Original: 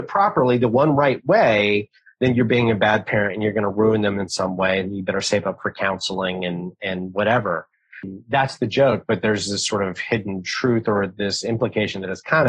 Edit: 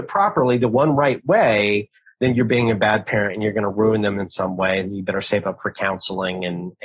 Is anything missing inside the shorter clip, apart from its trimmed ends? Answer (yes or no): no